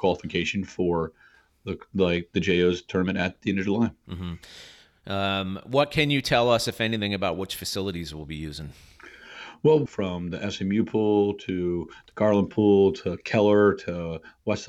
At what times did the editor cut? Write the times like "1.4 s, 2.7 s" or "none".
9.9 s